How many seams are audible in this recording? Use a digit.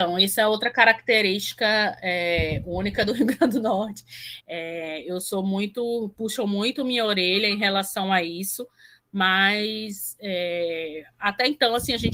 1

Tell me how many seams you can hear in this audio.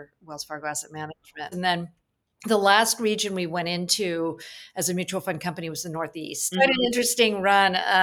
2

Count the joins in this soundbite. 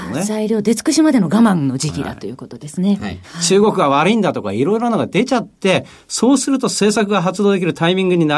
1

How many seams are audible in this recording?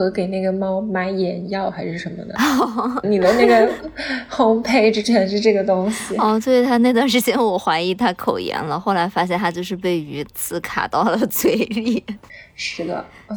1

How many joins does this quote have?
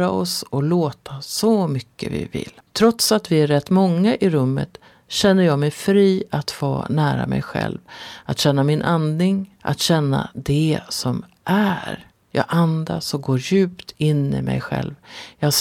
2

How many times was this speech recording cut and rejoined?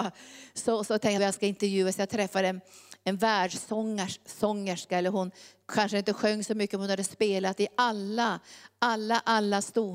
1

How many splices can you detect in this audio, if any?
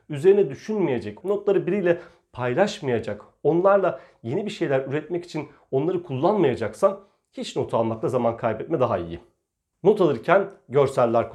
2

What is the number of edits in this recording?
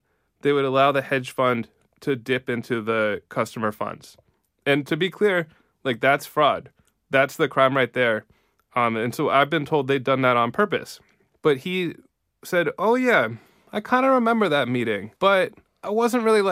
2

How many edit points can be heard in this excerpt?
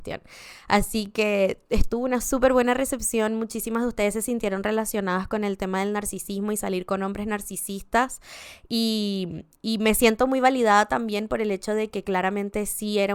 0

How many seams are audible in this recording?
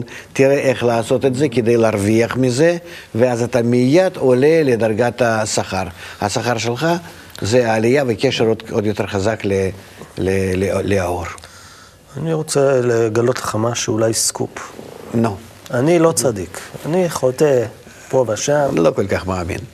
0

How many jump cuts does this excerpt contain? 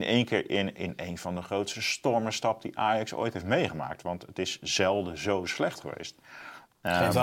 0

